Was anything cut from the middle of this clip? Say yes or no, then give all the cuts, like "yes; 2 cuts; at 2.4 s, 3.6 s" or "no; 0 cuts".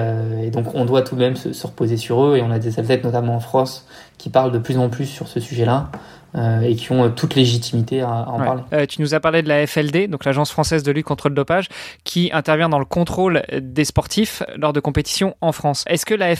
no; 0 cuts